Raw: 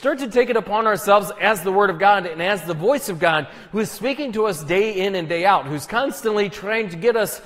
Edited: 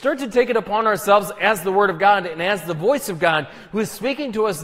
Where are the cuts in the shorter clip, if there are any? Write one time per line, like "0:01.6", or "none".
none

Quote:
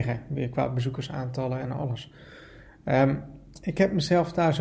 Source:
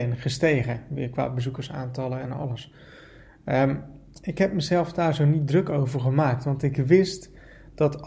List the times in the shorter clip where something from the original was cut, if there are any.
none

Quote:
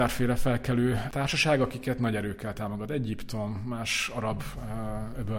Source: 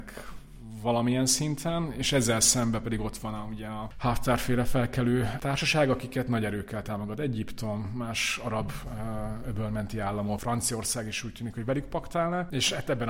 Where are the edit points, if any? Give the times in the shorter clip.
none

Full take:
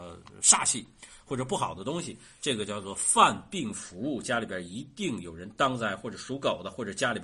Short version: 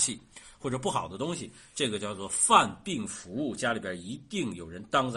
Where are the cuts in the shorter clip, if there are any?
none

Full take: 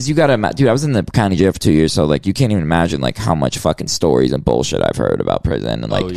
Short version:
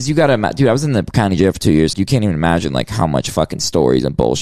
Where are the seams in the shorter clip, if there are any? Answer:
0:01.9

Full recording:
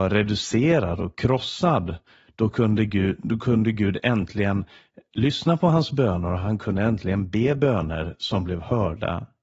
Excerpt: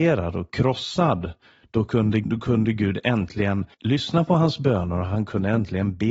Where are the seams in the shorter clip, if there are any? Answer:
0:02.2
0:03.7

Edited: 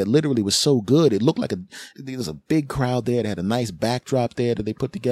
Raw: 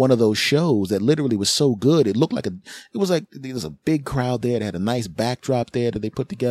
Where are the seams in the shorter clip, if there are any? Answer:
0:01.9

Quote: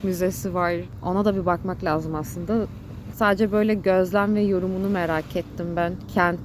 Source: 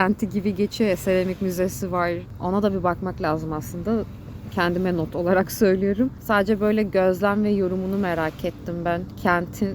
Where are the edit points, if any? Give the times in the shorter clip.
0:03.1

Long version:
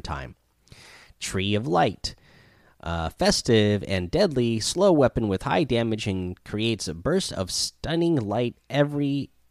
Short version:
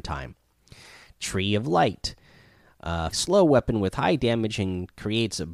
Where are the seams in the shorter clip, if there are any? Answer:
0:03.1

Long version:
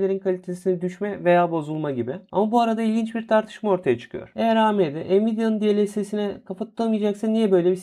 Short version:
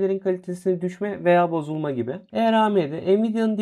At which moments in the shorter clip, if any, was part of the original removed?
0:02.3

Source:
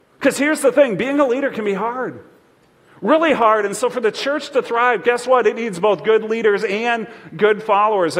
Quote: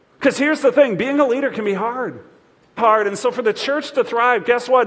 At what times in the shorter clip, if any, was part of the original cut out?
0:02.8

